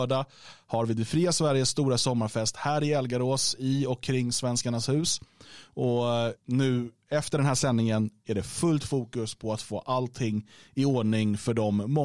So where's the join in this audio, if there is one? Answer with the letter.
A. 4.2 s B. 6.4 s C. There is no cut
B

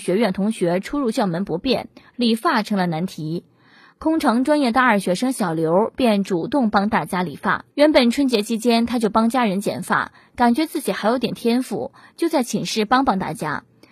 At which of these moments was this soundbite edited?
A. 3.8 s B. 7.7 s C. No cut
B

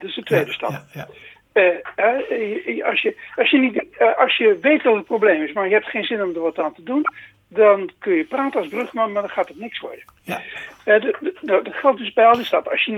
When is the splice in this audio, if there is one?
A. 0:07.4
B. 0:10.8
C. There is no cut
C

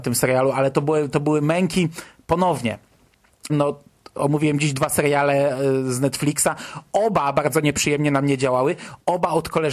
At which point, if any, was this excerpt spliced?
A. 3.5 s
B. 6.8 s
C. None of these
A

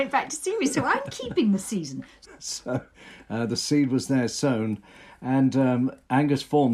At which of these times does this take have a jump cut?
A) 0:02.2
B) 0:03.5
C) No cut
A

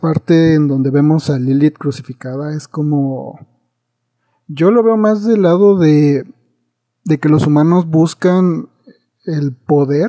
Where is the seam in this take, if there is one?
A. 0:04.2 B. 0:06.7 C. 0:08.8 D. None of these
D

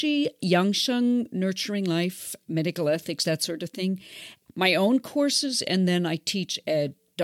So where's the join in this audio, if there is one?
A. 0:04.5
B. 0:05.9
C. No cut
A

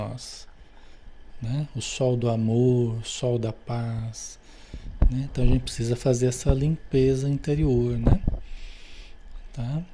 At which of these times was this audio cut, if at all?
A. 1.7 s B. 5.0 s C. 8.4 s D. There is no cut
D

